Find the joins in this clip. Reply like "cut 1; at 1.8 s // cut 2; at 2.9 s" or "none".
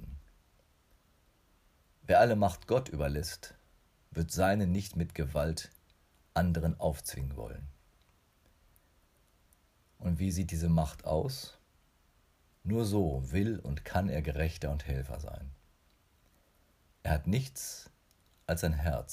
cut 1; at 12.5 s